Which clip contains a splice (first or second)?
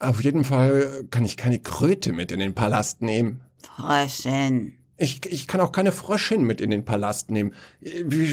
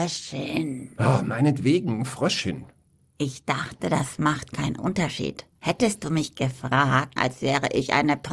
second